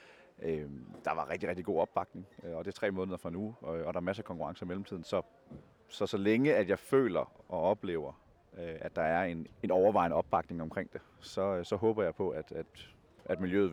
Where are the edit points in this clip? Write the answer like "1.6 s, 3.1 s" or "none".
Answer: 9.5 s